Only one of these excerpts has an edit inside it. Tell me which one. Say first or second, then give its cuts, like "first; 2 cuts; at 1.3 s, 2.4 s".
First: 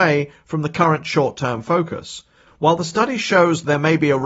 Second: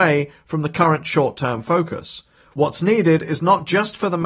first; 1 cut; at 2.5 s